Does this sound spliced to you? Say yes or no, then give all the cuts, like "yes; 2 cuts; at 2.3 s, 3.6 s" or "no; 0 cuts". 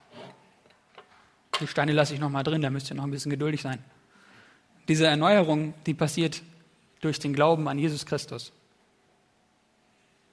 no; 0 cuts